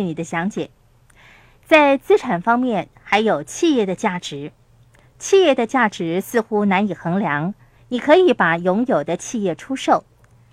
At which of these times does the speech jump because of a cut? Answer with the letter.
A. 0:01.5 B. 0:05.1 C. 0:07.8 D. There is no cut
C